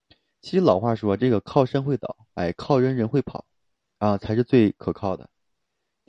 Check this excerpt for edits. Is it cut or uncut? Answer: cut